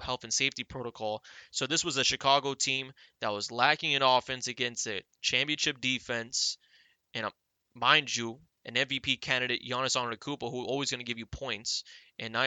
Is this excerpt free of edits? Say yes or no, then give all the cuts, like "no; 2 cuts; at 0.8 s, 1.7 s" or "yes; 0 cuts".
yes; 0 cuts